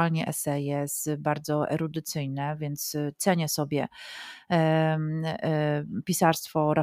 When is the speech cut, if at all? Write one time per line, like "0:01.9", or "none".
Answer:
none